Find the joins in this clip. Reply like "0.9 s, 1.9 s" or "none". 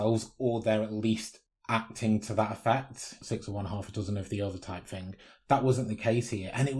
none

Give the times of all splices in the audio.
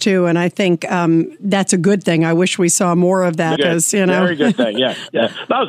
3.6 s

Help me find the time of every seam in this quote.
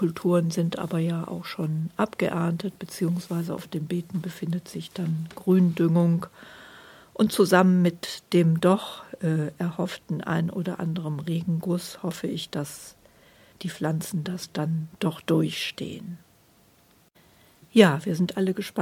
none

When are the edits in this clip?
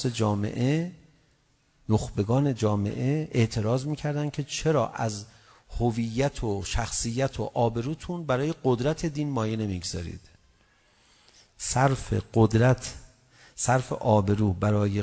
none

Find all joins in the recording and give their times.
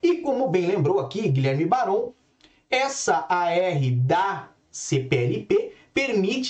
none

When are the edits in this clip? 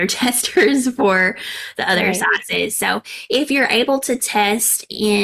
none

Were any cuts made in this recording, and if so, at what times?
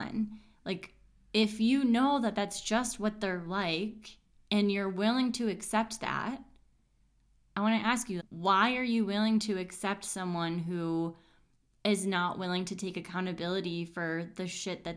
8.2 s

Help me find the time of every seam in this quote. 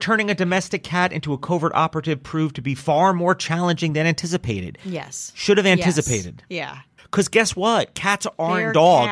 7.0 s

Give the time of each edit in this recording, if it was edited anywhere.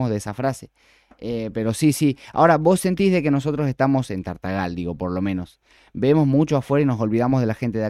none

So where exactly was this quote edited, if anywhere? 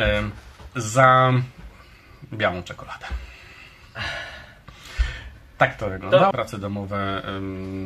6.3 s

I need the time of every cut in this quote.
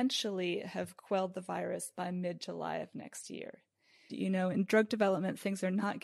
4.1 s

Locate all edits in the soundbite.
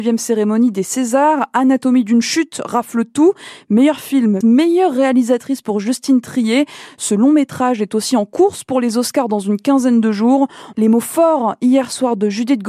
4.4 s, 10.7 s

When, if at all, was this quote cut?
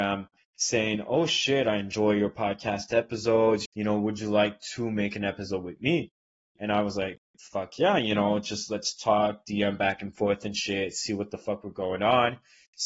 3.6 s

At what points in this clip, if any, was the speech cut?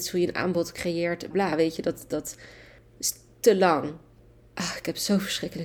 1.3 s, 4.4 s

